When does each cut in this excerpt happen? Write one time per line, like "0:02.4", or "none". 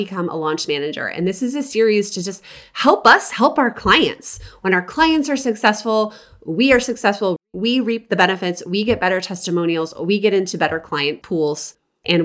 none